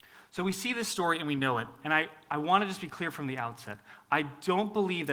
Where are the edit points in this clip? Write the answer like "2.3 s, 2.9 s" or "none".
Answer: none